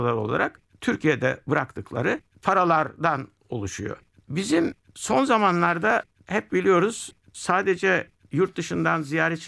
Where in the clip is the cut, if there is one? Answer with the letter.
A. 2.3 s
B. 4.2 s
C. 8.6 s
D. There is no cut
D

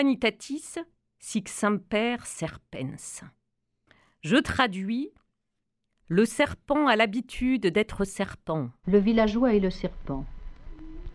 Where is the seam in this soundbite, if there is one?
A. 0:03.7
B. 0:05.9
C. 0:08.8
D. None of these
C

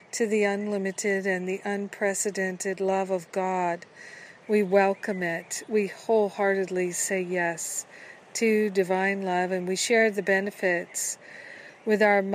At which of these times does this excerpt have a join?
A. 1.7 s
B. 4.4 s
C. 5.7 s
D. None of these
B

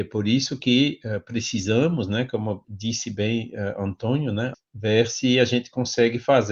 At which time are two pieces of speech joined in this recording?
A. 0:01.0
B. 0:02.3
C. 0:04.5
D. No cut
C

